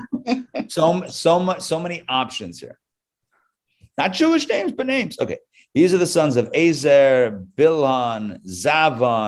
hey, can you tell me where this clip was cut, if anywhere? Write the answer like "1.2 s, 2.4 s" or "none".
none